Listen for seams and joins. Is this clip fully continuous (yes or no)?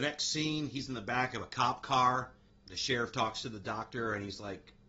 yes